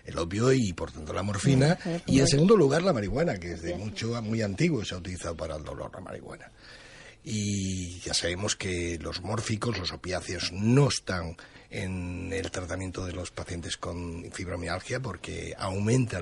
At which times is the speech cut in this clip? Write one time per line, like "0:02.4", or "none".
none

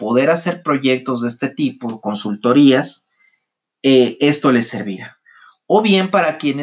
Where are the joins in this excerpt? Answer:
none

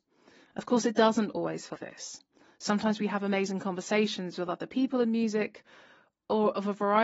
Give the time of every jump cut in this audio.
0:01.7

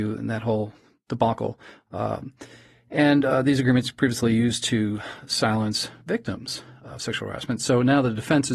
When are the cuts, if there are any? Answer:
none

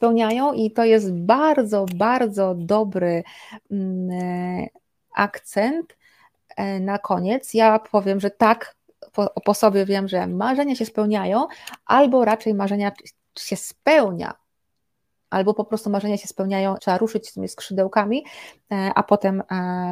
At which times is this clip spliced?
0:13.3
0:16.8

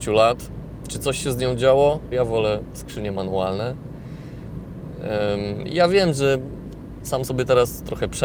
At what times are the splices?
0:02.1

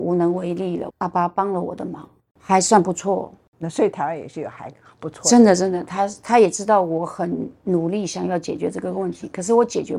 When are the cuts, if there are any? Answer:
0:00.9
0:02.3

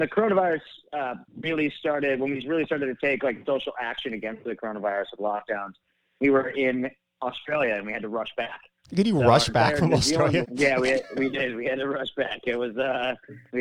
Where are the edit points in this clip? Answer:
0:01.3
0:10.4

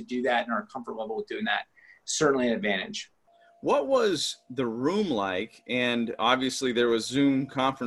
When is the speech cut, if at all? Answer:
none

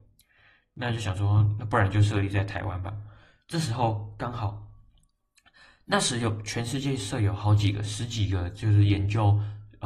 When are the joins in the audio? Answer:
0:03.4

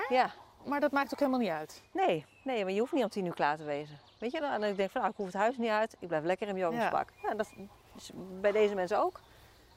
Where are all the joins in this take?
0:04.2

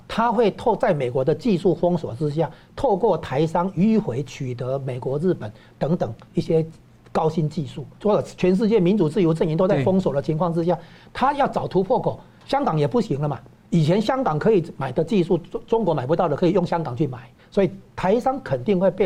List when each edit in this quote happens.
0:07.9
0:17.4

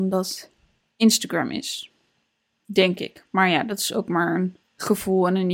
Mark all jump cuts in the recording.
none

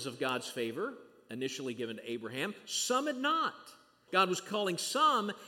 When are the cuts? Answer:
0:04.1

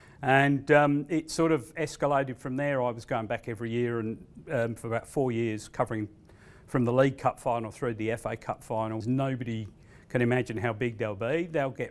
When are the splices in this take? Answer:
0:09.0

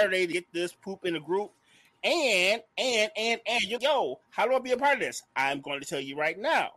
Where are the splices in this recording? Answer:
0:03.8

